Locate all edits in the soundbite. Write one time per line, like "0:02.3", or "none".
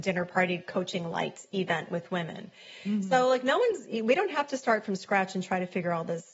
none

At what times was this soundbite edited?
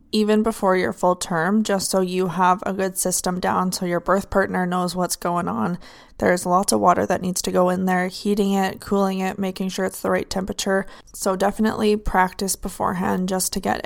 0:06.1

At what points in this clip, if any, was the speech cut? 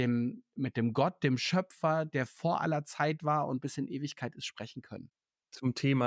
none

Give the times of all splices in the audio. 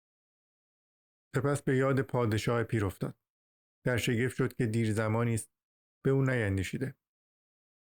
none

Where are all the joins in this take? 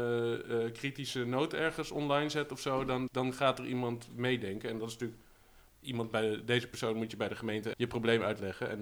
0:03.1
0:05.7
0:07.7

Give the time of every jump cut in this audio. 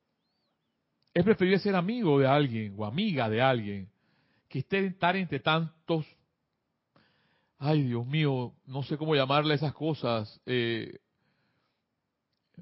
none

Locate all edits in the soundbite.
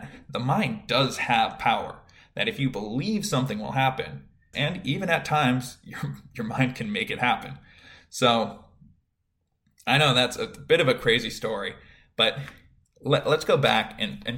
0:04.5

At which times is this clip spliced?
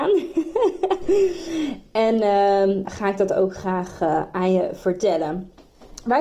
0:02.8

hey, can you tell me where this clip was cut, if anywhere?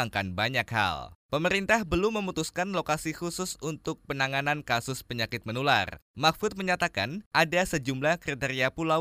0:01.2
0:06.1

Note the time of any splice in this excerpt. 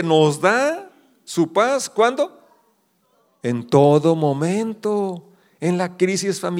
none

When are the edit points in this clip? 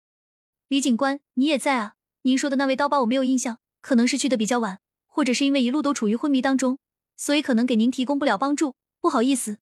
none

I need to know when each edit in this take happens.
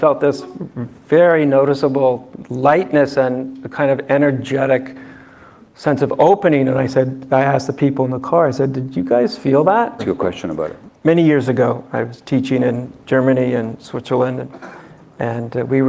0:10.0

